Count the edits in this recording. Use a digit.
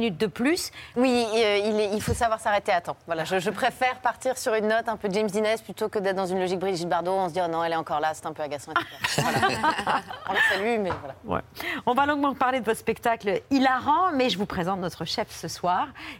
1